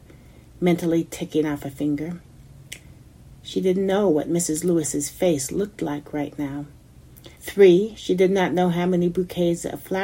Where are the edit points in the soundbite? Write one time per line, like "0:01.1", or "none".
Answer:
0:07.4